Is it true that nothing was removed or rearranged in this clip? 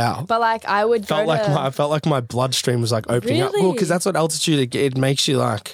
yes; 0 cuts

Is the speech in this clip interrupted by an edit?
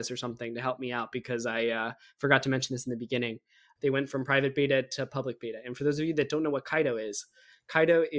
yes; 1 cut; at 3.8 s

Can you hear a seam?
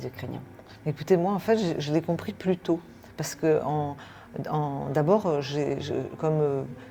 no; 0 cuts

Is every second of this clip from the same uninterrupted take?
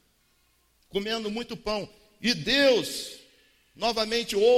yes; 0 cuts

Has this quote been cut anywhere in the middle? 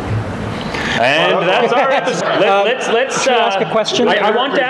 yes; 1 cut; at 2.2 s

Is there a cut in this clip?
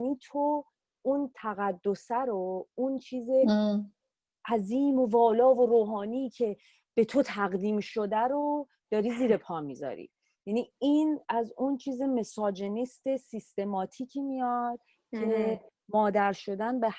yes; 1 cut; at 11.2 s

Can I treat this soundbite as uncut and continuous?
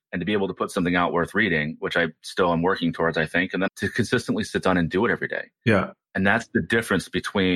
no; 1 cut; at 3.7 s

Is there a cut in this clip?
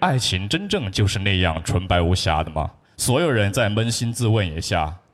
yes; 1 cut; at 2.8 s

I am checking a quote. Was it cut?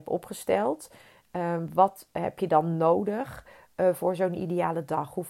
no; 0 cuts

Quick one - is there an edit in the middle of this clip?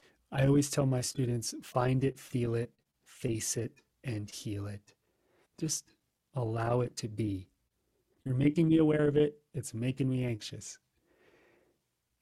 yes; 2 cuts; at 5.5 s, 8.2 s

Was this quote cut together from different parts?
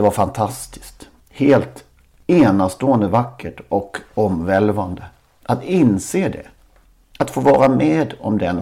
no; 0 cuts

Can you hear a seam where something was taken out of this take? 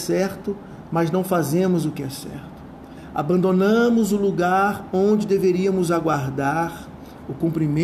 no; 0 cuts

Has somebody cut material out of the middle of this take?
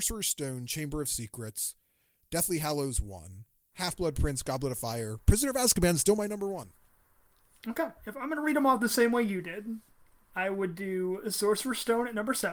yes; 1 cut; at 3.7 s

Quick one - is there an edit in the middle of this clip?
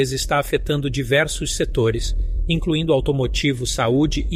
no; 0 cuts

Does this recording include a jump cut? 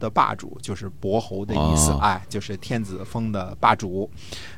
no; 0 cuts

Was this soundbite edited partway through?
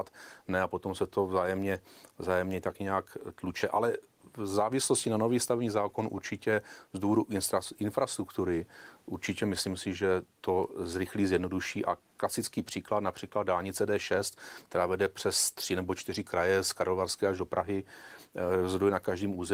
no; 0 cuts

